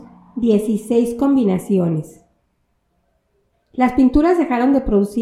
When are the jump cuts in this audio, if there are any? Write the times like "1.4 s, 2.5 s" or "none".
3.5 s